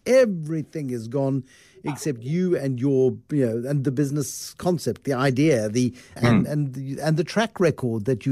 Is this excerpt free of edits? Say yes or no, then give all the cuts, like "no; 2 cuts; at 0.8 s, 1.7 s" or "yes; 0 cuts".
no; 1 cut; at 6.2 s